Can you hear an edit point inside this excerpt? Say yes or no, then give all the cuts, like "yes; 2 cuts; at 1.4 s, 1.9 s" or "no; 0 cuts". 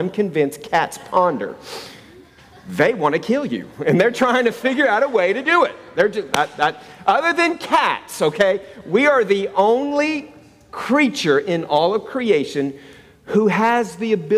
no; 0 cuts